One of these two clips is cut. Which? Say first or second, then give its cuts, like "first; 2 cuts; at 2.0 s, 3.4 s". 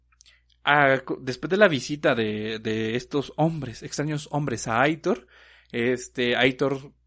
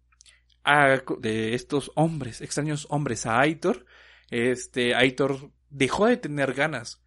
second; 2 cuts; at 1.2 s, 5.6 s